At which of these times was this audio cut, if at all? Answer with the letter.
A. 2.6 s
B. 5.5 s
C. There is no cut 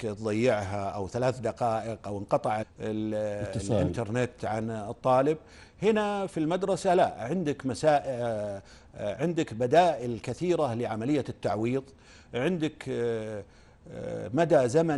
A